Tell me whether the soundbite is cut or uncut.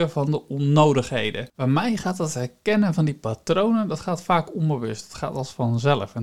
cut